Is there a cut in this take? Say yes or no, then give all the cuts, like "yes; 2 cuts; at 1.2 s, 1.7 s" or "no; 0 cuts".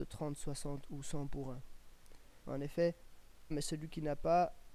yes; 2 cuts; at 2.4 s, 3.5 s